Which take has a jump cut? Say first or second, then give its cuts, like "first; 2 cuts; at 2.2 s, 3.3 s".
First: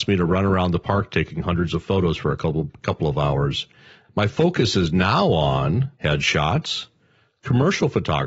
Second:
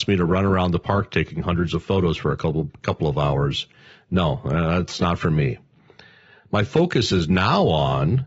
first; 2 cuts; at 4.0 s, 5.9 s